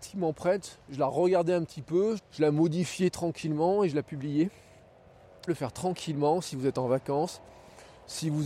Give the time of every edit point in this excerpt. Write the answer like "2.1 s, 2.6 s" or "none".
2.2 s, 5.5 s